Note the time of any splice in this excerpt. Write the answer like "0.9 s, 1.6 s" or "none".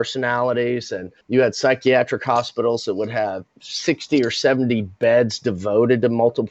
1.2 s